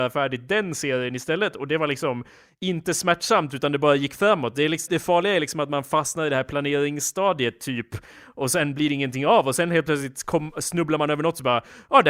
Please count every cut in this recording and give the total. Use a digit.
1